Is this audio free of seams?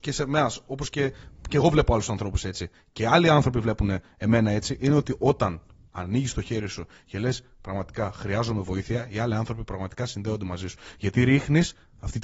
yes; 0 cuts

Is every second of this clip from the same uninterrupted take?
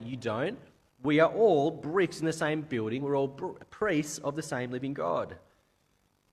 yes; 0 cuts

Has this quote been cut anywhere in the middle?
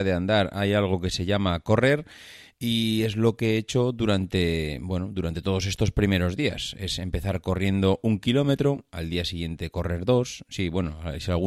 no; 0 cuts

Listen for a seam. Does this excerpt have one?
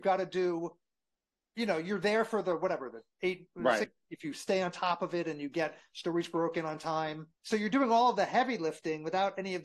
yes; 2 cuts; at 3.8 s, 7.4 s

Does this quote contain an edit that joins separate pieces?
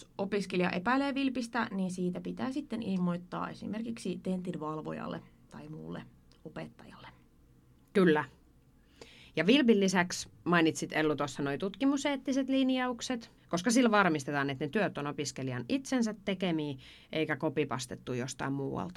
yes; 1 cut; at 13.4 s

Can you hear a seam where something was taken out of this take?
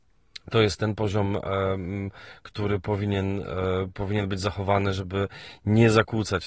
no; 0 cuts

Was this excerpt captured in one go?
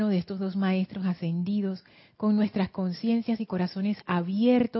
yes; 0 cuts

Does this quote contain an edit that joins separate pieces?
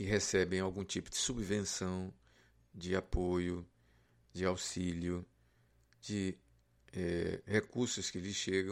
no; 0 cuts

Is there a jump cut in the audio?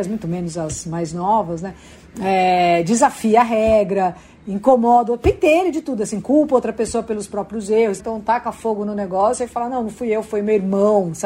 yes; 1 cut; at 8.0 s

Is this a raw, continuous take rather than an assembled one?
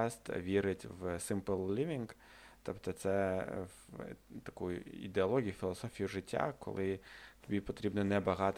yes; 0 cuts

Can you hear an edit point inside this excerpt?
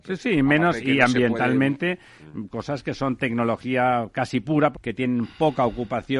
yes; 2 cuts; at 2.5 s, 4.7 s

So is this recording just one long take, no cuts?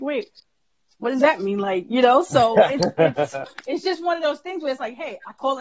yes; 0 cuts

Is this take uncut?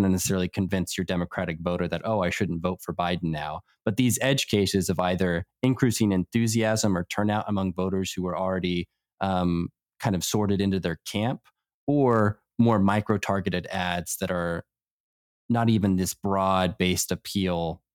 yes; 0 cuts

